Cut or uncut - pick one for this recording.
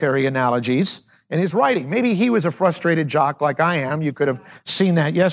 uncut